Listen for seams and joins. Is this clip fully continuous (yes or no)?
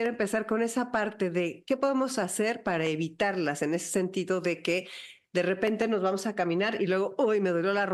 yes